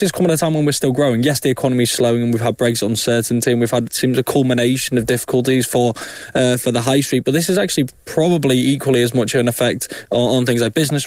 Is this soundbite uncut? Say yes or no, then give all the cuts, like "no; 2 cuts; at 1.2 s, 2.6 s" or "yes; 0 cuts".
yes; 0 cuts